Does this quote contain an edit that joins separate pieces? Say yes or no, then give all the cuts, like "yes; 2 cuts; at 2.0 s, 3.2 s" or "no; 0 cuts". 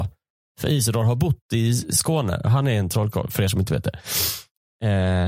no; 0 cuts